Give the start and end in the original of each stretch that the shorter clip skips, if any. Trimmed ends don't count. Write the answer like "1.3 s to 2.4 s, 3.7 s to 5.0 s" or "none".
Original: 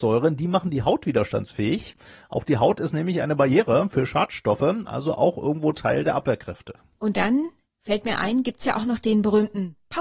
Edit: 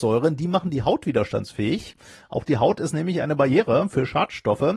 none